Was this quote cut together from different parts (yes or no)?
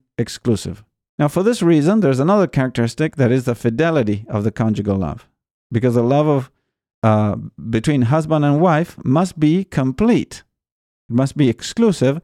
yes